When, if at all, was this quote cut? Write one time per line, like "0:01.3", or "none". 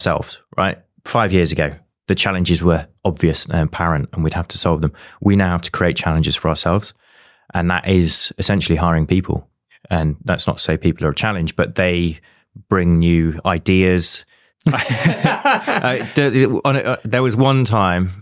0:14.5